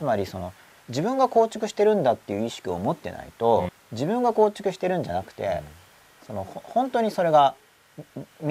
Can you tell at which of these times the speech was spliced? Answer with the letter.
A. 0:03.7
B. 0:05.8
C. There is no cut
A